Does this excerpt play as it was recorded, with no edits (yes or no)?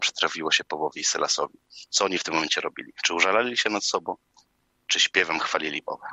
yes